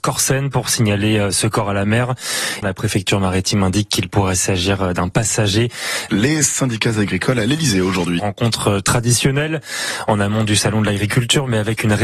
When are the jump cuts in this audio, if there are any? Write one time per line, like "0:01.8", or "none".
0:02.6
0:06.1
0:08.2